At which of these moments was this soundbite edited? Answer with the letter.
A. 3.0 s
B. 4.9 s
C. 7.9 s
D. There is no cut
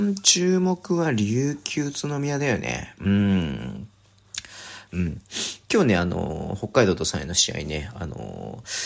B